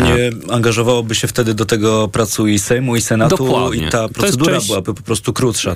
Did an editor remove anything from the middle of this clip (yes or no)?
no